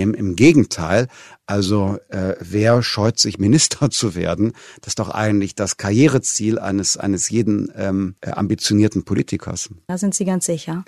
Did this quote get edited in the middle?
yes; 1 cut; at 9.9 s

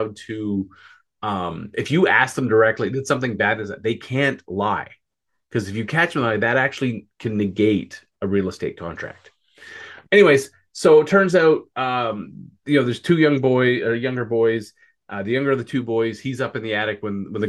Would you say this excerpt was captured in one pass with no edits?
yes; 0 cuts

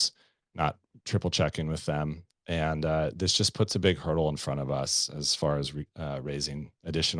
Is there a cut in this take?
no; 0 cuts

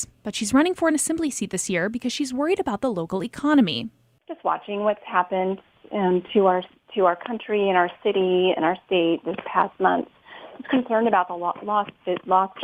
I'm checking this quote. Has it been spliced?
no; 0 cuts

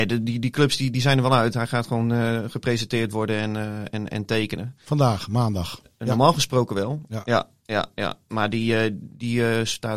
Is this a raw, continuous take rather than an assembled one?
yes; 0 cuts

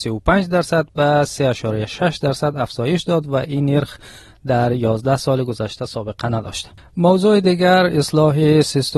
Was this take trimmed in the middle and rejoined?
no; 0 cuts

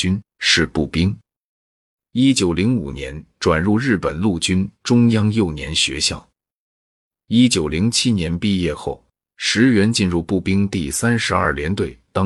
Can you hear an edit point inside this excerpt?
no; 0 cuts

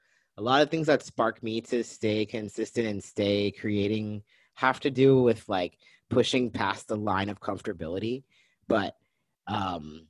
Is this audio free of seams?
yes; 0 cuts

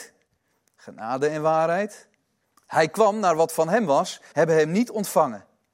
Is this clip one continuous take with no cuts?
no; 2 cuts; at 2.6 s, 4.3 s

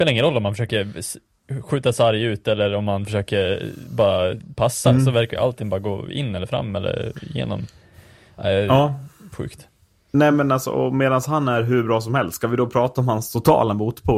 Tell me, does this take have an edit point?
no; 0 cuts

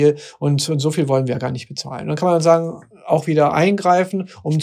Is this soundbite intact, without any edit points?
yes; 0 cuts

